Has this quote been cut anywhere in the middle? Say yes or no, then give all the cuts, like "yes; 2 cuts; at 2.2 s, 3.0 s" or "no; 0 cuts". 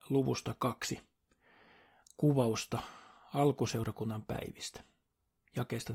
no; 0 cuts